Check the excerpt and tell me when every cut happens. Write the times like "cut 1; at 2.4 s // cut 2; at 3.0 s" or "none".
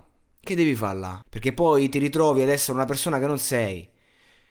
cut 1; at 1.2 s